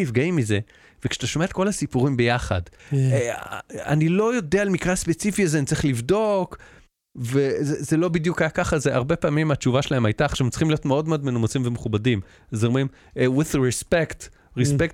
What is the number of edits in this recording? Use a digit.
1